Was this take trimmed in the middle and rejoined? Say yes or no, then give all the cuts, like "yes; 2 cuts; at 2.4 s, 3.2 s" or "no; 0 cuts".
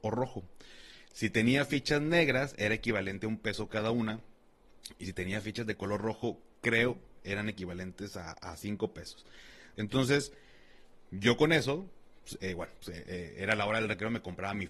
yes; 1 cut; at 9.8 s